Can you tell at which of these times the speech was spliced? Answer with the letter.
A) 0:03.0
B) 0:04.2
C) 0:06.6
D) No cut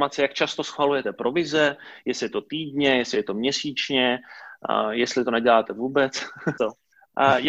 C